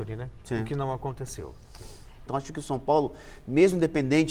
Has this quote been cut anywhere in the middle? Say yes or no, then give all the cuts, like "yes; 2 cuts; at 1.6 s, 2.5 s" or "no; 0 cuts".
yes; 1 cut; at 2.3 s